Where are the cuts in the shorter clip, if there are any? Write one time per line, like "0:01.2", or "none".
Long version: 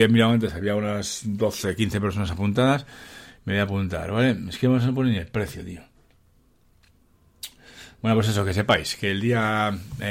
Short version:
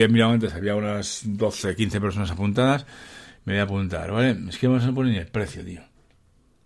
none